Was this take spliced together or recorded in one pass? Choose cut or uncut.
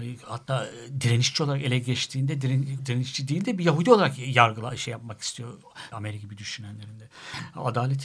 cut